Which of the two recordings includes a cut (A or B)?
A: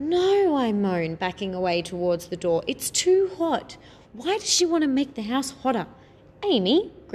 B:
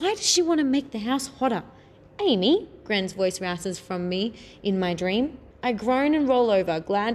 B